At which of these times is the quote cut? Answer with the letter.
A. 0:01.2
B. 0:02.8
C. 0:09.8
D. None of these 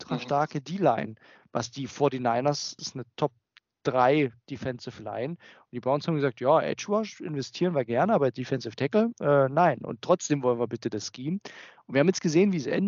B